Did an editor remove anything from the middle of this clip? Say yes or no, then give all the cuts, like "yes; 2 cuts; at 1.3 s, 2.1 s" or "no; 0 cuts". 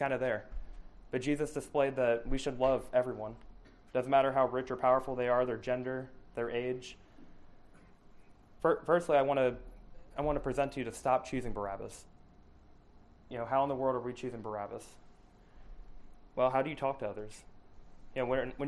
yes; 2 cuts; at 8.6 s, 13.3 s